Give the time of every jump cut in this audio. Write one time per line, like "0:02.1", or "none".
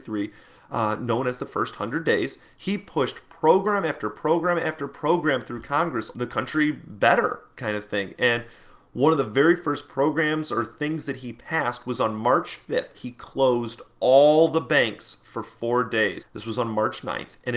0:06.1
0:12.9
0:16.2